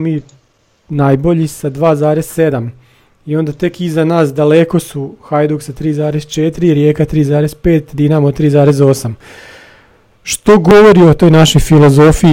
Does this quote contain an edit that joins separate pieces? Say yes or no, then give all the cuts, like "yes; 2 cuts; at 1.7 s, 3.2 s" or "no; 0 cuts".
no; 0 cuts